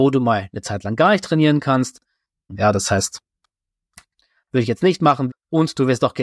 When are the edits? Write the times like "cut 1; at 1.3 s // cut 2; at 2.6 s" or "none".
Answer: cut 1; at 2.5 s // cut 2; at 5.3 s